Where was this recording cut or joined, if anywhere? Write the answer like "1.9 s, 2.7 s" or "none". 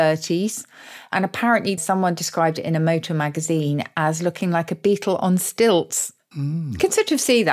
1.8 s

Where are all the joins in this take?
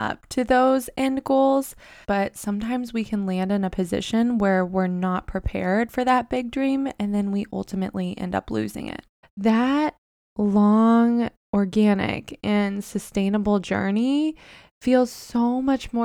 2.0 s, 9.2 s

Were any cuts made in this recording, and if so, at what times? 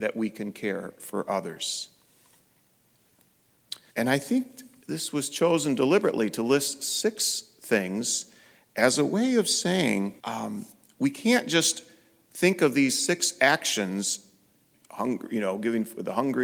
3.9 s, 10.2 s

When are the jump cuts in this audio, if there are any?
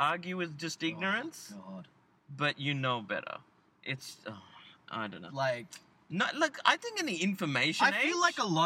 5.3 s

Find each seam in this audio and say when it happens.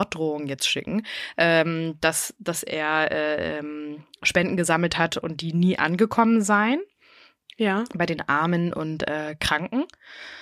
none

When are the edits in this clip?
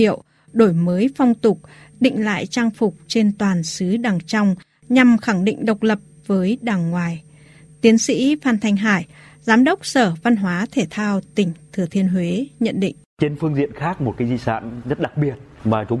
none

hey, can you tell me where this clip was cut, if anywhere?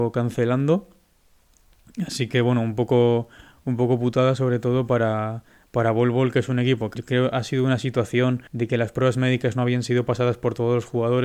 6.9 s, 8.5 s

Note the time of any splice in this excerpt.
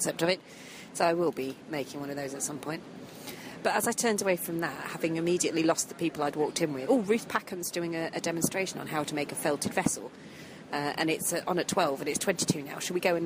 6.9 s

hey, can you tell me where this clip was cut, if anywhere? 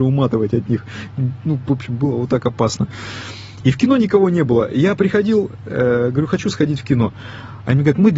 none

